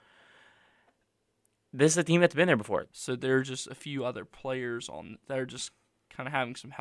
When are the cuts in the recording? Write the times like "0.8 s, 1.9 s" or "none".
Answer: 2.9 s, 5.2 s